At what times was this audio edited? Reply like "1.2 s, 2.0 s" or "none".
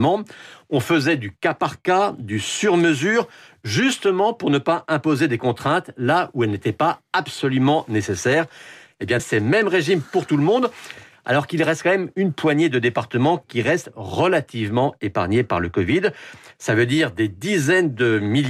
9.2 s